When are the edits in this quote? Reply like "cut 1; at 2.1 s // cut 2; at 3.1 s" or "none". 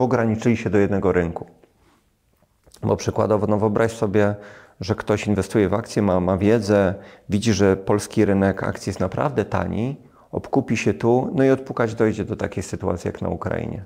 none